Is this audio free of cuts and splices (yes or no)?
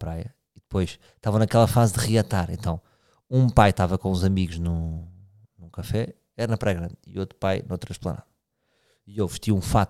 yes